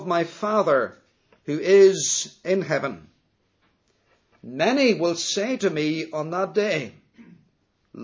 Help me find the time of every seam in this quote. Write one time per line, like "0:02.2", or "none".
none